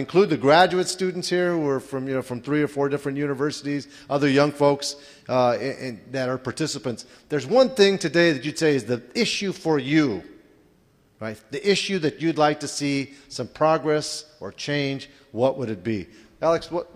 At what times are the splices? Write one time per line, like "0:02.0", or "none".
none